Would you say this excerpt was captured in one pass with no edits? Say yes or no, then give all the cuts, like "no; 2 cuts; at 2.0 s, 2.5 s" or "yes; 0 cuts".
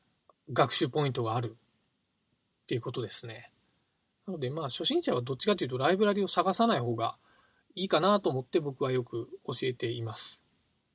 no; 1 cut; at 4.2 s